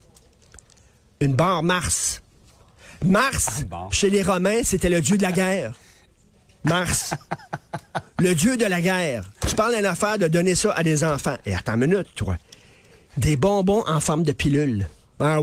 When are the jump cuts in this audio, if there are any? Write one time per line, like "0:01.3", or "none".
0:12.2